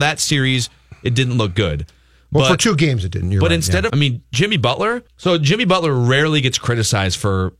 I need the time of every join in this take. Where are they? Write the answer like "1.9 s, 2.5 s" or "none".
3.9 s, 5.1 s